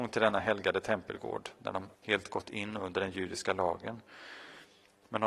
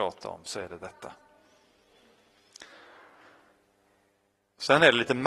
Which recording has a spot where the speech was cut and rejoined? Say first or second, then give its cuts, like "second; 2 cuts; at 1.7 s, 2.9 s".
first; 1 cut; at 1.9 s